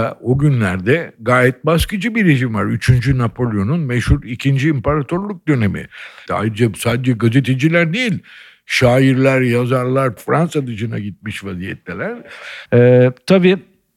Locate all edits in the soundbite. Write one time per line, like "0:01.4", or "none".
0:06.3
0:10.2
0:12.6